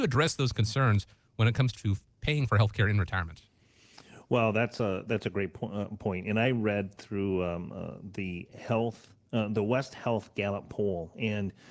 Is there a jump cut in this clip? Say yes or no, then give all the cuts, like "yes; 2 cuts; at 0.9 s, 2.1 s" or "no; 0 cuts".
yes; 1 cut; at 1.7 s